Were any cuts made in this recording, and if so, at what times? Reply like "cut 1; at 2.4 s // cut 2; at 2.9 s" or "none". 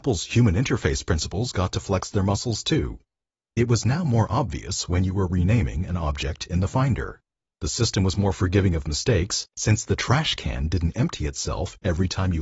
none